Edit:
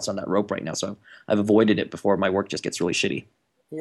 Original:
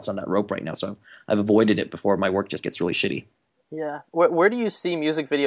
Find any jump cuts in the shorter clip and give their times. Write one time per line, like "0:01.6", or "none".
none